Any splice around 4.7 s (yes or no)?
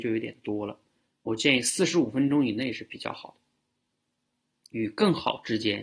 yes